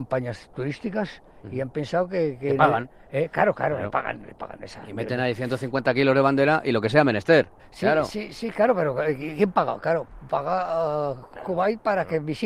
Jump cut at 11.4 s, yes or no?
no